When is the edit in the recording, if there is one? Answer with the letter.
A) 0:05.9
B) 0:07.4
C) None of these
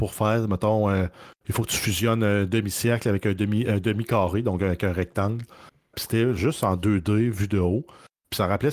A